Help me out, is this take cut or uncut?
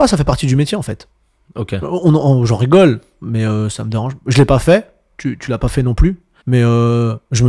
cut